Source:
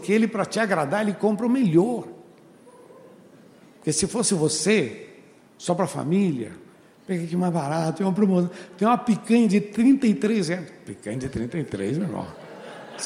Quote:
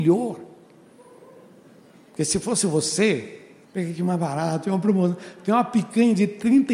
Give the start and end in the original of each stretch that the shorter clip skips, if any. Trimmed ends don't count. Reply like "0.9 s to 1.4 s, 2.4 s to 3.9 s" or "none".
5.3 s to 7.0 s

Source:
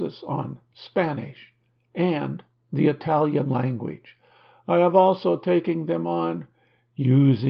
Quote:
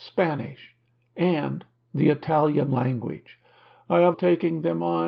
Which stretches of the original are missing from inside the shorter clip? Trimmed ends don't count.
4.9 s to 5.4 s

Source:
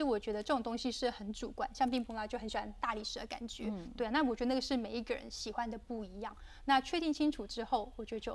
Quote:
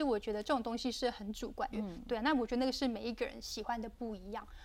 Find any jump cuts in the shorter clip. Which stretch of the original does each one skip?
1.7 s to 3.6 s

